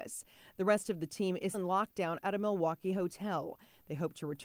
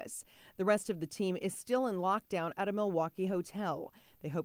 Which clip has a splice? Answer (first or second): first